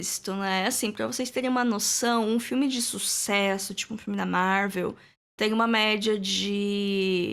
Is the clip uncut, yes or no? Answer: yes